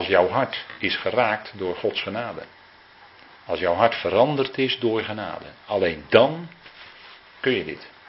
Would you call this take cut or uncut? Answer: uncut